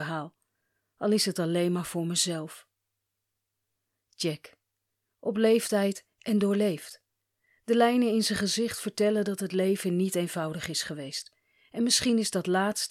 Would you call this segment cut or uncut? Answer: uncut